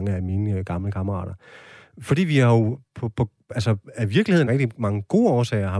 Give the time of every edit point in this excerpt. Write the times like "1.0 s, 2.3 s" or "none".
4.5 s

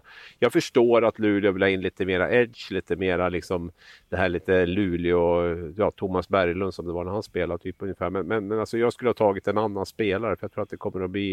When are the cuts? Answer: none

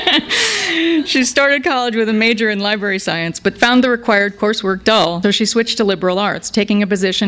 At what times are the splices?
5.2 s

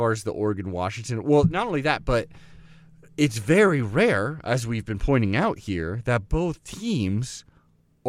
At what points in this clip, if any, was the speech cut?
none

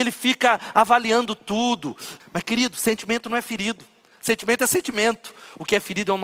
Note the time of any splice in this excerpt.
2.2 s

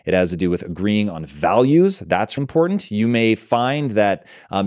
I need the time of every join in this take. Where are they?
2.4 s

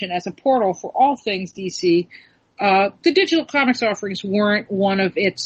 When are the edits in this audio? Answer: none

